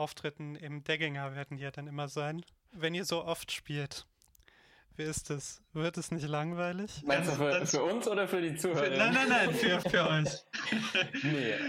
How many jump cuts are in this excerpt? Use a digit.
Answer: 1